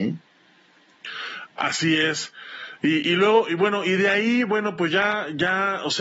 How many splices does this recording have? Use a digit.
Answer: 0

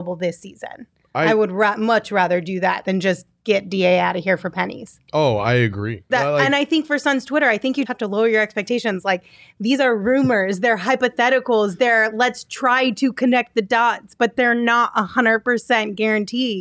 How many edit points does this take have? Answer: 2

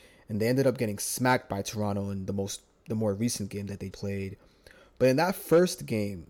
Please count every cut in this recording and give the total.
1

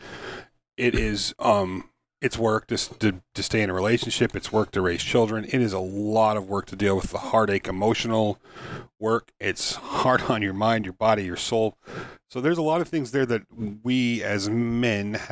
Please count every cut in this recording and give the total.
0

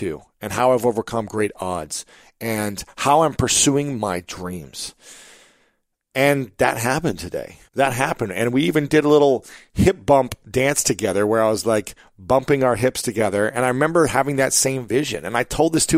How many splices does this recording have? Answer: 1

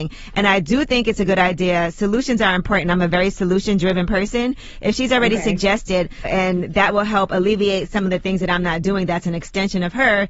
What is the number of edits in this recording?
1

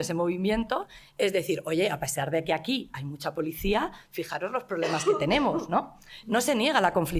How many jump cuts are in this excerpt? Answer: 0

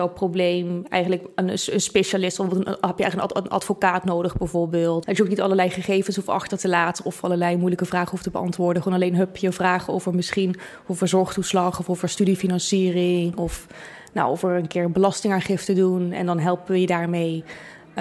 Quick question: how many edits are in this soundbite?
1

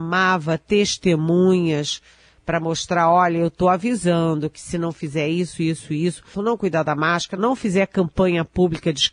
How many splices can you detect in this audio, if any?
2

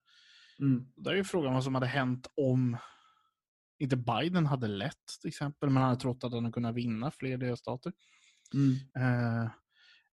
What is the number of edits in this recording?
1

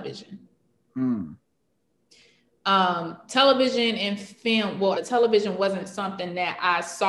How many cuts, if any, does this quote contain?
1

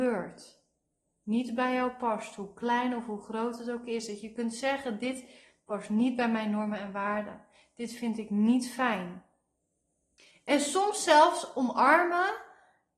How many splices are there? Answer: 0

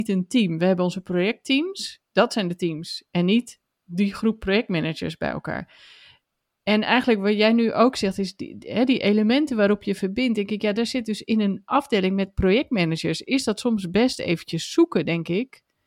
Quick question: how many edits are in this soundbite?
0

